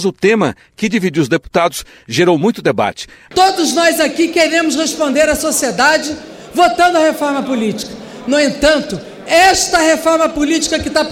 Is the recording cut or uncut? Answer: cut